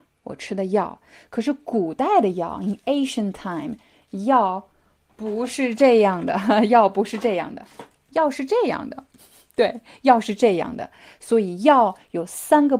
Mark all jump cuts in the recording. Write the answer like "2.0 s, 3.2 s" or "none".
none